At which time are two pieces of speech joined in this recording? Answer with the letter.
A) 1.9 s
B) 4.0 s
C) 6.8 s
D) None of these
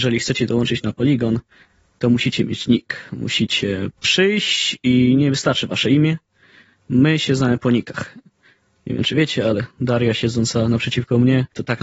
B